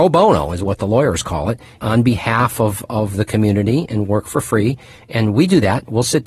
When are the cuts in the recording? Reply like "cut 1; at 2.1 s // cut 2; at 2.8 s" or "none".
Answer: cut 1; at 1.8 s